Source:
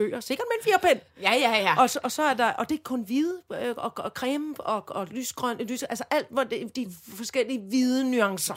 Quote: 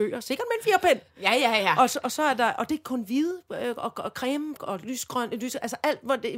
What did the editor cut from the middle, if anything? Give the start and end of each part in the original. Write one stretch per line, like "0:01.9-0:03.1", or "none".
0:04.6-0:04.8

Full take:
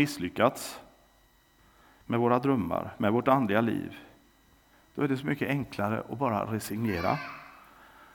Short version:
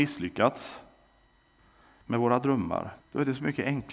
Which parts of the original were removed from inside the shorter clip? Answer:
0:03.0-0:04.8

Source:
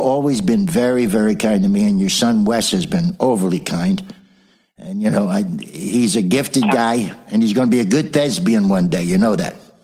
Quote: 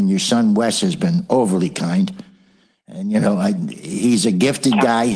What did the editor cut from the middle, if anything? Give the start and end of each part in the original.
none

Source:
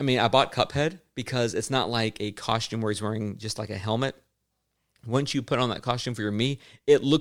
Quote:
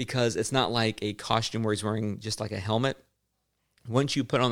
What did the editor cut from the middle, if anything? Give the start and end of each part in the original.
none

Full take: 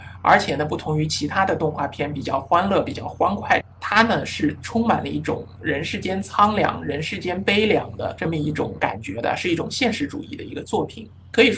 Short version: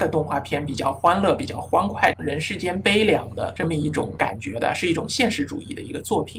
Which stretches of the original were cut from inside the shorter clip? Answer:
0:03.7-0:06.8

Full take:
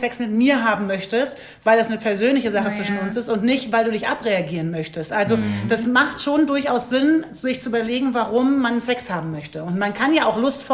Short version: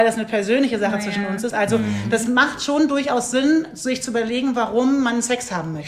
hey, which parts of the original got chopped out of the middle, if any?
0:03.2-0:05.1

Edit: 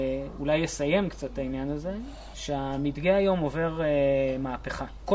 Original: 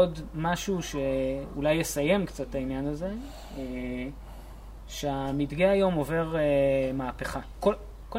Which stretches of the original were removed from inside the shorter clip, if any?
0:03.5-0:04.9

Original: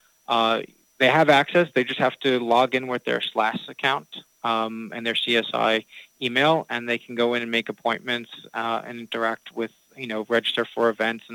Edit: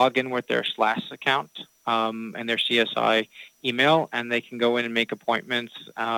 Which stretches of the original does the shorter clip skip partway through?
none

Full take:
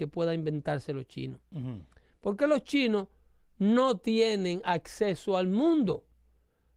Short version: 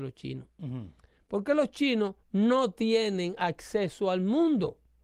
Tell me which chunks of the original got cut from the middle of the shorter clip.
0:03.1-0:03.5

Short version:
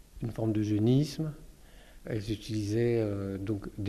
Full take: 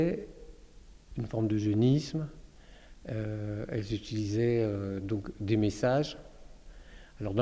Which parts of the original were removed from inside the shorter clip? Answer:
0:03.0-0:03.7

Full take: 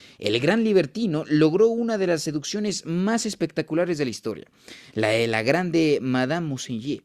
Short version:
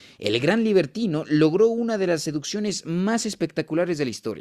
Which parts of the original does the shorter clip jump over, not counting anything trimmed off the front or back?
none

